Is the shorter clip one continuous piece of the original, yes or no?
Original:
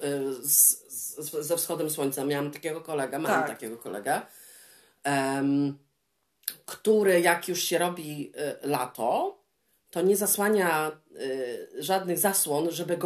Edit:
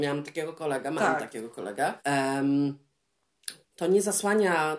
no